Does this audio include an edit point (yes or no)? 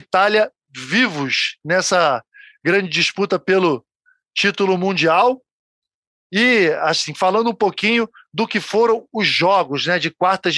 no